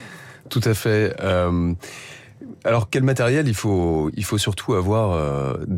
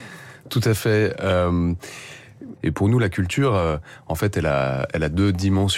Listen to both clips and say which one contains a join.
second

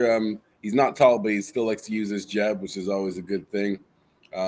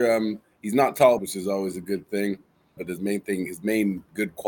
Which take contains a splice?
second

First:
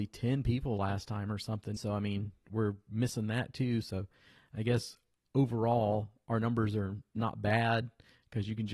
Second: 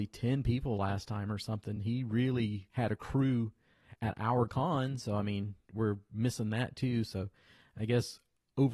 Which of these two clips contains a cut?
first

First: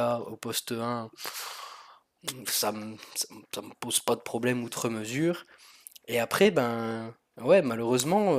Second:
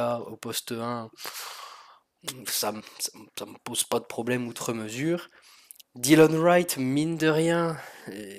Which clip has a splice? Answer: second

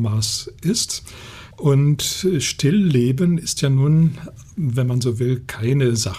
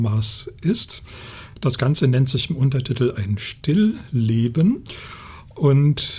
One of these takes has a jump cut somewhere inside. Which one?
first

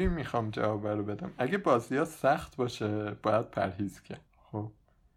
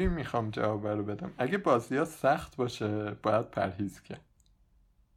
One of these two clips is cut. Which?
first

